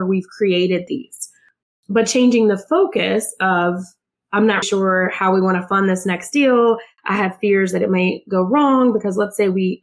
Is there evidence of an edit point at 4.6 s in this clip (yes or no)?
yes